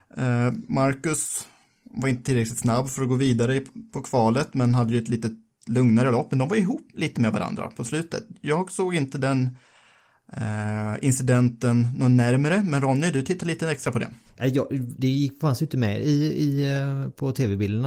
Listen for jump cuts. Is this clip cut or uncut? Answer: uncut